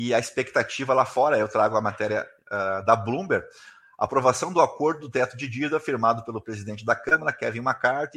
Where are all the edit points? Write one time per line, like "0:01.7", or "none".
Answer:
none